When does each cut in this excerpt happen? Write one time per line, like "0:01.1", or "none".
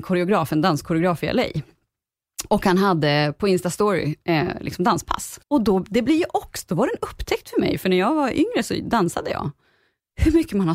0:05.4